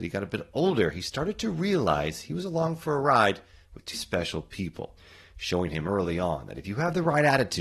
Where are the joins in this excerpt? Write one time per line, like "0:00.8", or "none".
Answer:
0:03.9